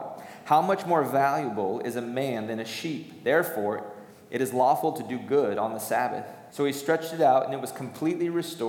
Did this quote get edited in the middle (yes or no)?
yes